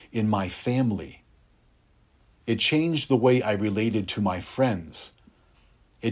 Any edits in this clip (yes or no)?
no